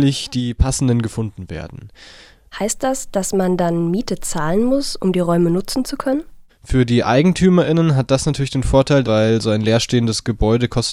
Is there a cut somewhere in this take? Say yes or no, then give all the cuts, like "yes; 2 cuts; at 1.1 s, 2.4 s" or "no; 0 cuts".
yes; 3 cuts; at 2.5 s, 6.5 s, 9.0 s